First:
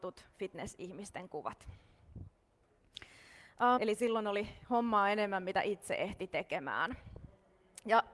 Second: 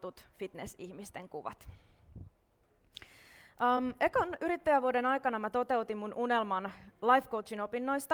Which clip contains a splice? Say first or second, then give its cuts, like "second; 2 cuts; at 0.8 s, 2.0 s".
first; 1 cut; at 3.8 s